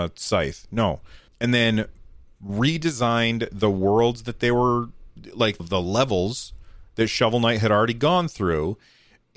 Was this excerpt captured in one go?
no; 2 cuts; at 1.3 s, 5.6 s

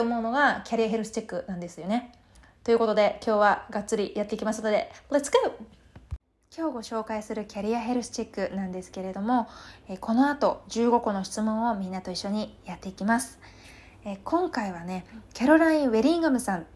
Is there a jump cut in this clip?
no; 0 cuts

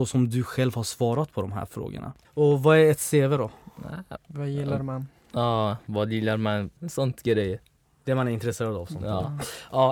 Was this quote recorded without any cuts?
no; 3 cuts; at 2.2 s, 4.2 s, 6.8 s

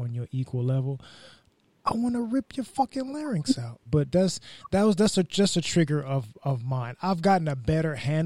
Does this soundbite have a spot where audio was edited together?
yes; 1 cut; at 3.9 s

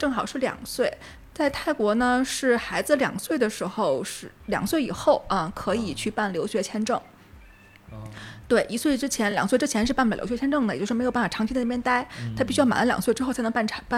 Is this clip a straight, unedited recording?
yes; 0 cuts

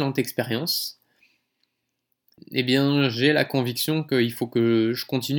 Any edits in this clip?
yes; 1 cut; at 2.4 s

